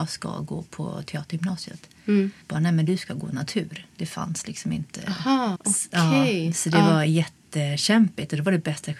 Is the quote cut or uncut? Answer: cut